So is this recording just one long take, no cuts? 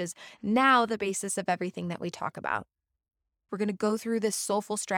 no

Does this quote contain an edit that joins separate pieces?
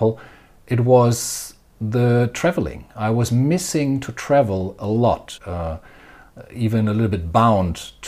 yes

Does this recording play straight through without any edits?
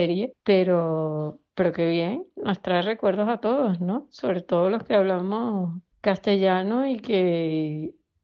yes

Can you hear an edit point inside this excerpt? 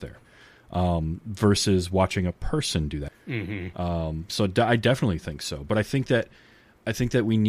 yes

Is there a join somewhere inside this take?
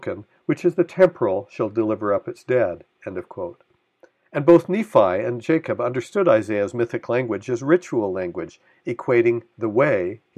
no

